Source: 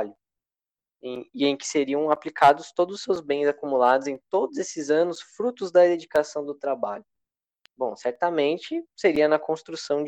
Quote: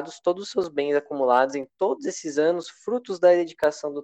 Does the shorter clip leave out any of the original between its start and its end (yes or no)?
no